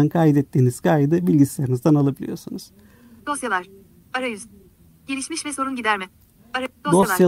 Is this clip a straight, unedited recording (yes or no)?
no